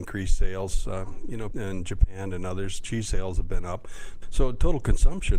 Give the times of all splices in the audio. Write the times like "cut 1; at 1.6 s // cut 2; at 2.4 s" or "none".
cut 1; at 1.5 s // cut 2; at 4.2 s